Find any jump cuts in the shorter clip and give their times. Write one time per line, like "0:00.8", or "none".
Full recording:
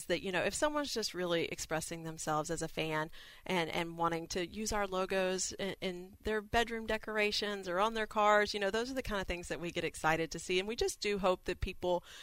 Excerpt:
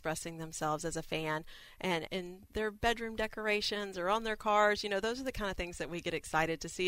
0:02.1